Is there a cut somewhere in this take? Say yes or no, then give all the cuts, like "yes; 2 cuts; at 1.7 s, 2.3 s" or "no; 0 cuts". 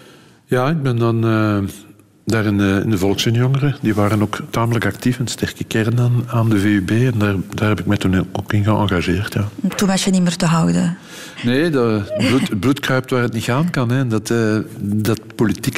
no; 0 cuts